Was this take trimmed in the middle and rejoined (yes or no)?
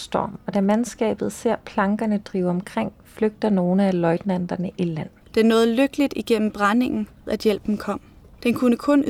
yes